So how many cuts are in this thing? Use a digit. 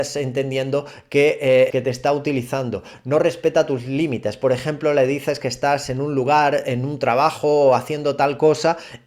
1